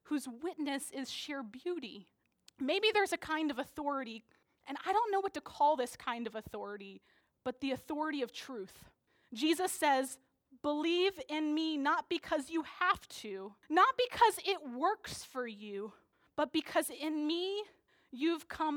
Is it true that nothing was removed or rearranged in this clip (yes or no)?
no